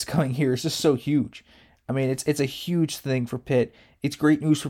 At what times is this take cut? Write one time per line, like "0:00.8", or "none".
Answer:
none